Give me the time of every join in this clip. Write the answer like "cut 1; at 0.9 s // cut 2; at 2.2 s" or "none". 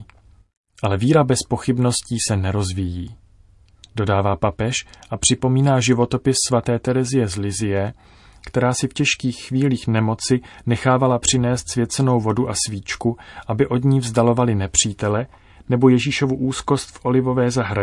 none